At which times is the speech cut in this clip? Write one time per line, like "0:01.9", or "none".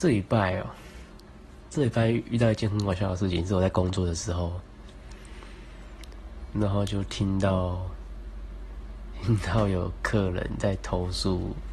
0:06.5